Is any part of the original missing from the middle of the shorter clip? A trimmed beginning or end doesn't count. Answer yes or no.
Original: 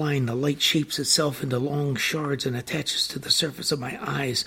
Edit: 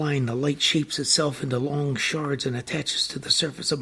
no